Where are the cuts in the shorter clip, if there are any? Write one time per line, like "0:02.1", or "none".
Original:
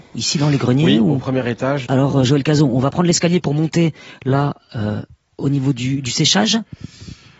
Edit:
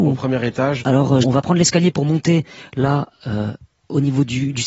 0:01.2